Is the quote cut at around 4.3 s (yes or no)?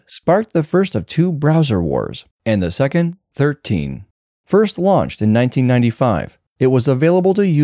yes